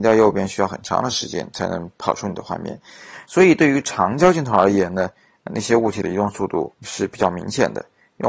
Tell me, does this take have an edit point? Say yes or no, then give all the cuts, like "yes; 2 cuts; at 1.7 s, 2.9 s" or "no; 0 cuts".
yes; 2 cuts; at 3.3 s, 6.7 s